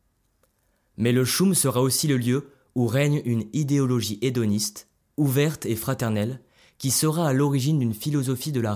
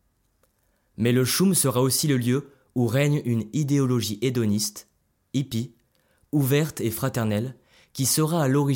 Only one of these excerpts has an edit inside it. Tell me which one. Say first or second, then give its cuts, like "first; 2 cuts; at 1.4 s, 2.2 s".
first; 1 cut; at 5.1 s